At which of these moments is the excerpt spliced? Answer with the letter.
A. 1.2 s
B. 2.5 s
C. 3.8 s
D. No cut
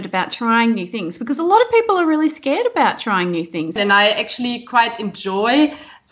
C